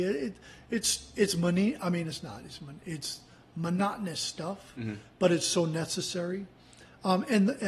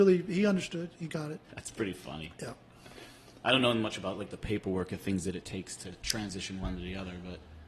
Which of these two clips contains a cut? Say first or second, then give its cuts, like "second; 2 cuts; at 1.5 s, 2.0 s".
second; 1 cut; at 1.4 s